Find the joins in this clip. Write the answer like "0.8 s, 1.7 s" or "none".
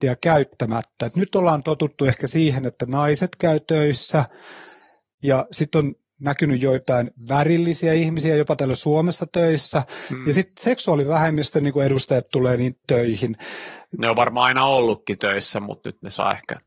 none